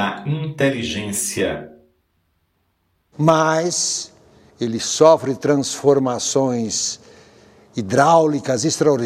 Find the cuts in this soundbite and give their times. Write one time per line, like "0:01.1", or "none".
0:03.1
0:04.5

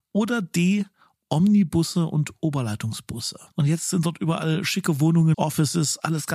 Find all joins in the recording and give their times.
0:03.5
0:05.3

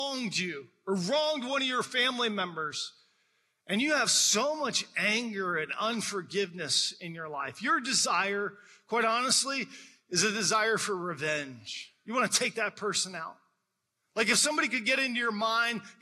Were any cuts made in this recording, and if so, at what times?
none

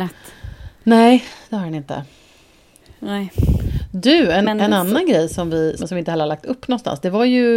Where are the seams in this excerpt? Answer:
0:05.8

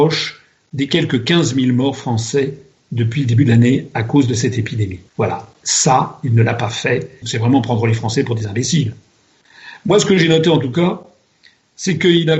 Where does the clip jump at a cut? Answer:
0:05.1
0:07.2

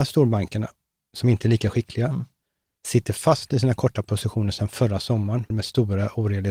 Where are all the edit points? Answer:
0:05.5

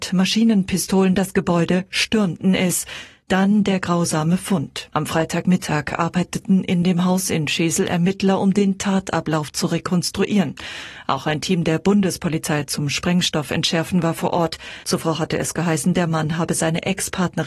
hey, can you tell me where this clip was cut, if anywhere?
0:04.9
0:14.8

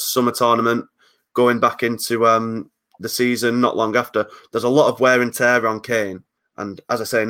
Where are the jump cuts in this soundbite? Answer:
none

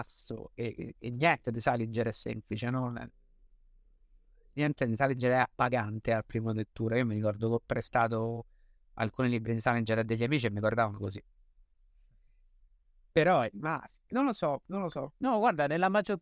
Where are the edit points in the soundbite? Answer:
none

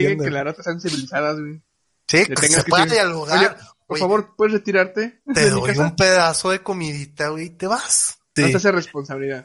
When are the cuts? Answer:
0:08.4

